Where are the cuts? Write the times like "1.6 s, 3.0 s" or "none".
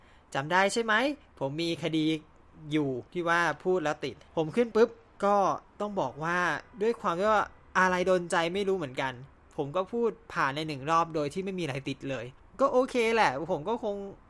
3.1 s, 4.7 s